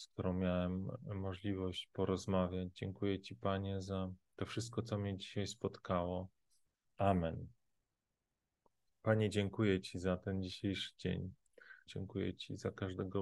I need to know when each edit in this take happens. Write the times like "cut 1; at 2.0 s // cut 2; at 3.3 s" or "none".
cut 1; at 6.8 s // cut 2; at 11.9 s